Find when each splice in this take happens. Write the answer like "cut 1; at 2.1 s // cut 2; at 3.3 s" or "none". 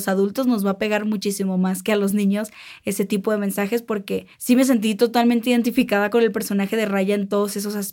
cut 1; at 4.3 s